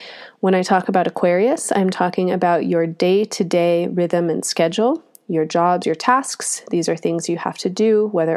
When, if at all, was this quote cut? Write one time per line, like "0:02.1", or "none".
0:05.8